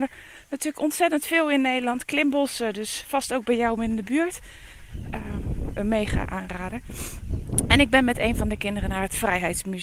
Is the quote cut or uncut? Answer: cut